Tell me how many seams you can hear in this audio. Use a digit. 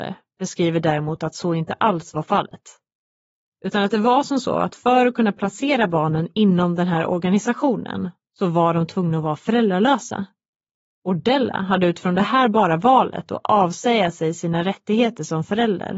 0